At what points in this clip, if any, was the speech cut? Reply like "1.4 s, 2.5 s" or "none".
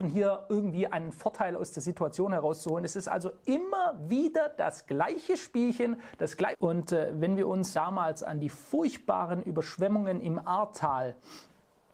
6.5 s, 7.7 s

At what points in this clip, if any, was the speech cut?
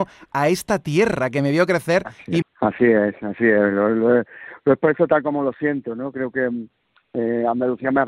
2.4 s

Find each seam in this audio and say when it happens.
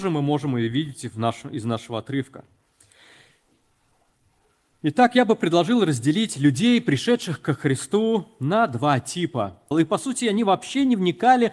9.7 s

